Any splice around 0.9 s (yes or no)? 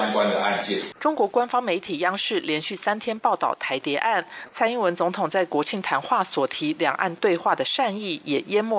yes